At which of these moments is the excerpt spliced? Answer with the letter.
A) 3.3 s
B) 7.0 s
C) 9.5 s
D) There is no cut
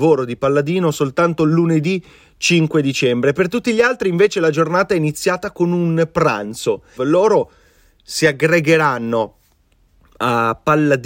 B